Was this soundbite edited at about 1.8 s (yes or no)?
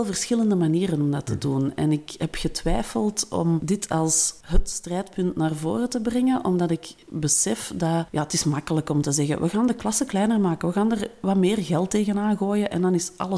no